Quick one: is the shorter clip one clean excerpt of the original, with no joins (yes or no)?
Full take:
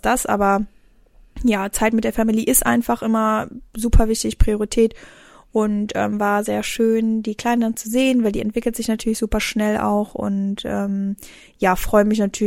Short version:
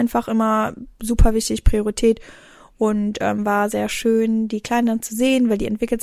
yes